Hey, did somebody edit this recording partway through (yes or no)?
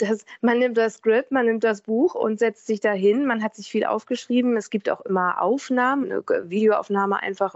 yes